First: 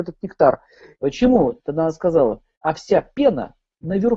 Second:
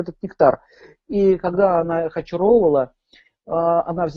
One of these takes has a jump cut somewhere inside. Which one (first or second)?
first